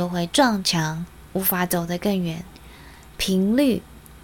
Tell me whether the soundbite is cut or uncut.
uncut